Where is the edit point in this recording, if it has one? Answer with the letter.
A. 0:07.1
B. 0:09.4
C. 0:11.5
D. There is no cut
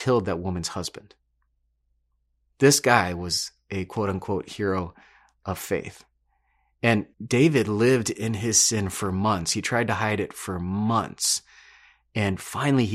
A